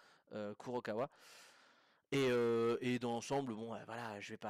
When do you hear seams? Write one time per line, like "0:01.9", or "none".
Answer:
none